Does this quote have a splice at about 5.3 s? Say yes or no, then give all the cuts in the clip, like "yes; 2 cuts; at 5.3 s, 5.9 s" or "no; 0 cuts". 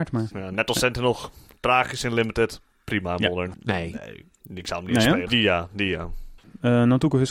yes; 2 cuts; at 3.5 s, 5.3 s